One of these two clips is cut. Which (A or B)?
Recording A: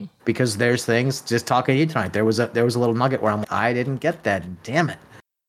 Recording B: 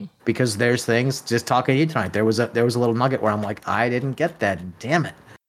A